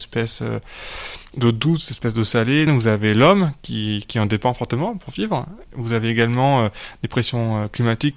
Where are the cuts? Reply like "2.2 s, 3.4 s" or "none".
2.7 s, 4.0 s